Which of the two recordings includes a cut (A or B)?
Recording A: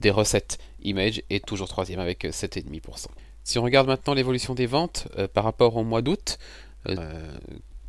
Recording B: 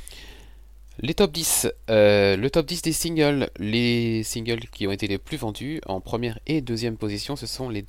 A